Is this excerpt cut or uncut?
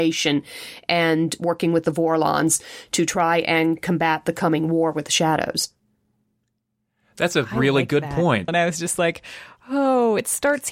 cut